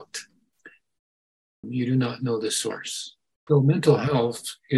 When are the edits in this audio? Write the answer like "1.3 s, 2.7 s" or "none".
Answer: 1.6 s, 3.5 s